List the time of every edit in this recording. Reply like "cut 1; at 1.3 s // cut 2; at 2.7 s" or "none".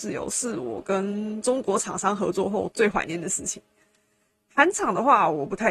none